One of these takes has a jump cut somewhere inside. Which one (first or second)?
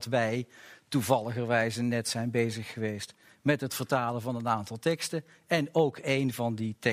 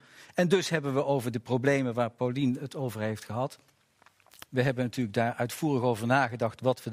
second